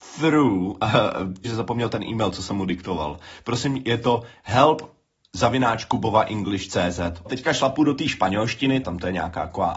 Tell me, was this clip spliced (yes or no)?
yes